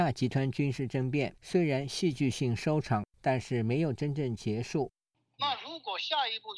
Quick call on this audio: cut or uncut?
uncut